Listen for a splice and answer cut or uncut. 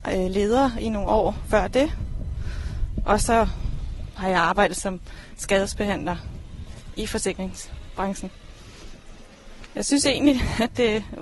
cut